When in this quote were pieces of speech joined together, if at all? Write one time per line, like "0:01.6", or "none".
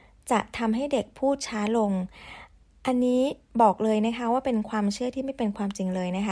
none